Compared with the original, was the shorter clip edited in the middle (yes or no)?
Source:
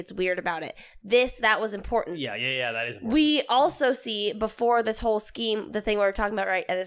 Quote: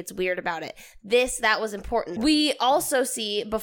yes